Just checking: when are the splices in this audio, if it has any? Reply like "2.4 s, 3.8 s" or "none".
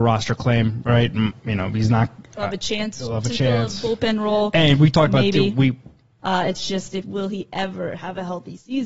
6.2 s